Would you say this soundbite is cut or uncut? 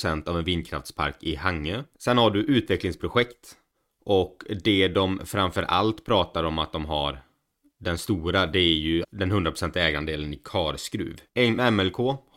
cut